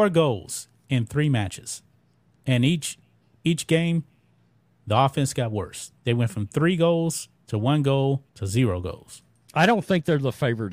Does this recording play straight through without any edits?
no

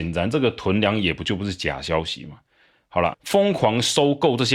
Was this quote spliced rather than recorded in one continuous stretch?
yes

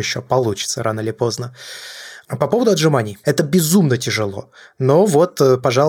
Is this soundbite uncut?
no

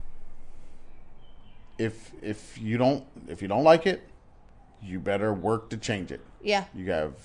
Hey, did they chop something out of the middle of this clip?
no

